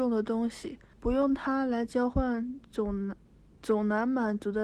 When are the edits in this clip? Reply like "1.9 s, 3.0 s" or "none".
0.9 s